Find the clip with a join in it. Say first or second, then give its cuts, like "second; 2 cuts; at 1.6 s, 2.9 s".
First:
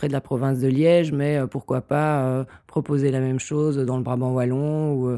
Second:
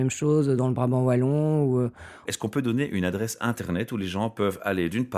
second; 1 cut; at 2.2 s